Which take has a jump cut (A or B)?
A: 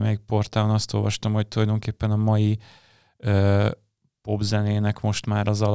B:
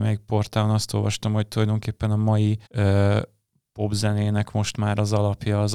B